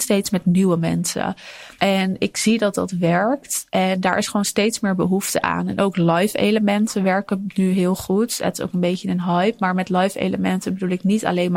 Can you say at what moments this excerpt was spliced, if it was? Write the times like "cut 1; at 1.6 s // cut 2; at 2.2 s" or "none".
none